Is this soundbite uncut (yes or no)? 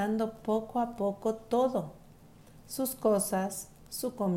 yes